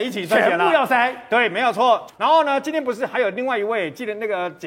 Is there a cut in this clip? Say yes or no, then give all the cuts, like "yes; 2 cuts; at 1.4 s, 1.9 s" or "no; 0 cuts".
no; 0 cuts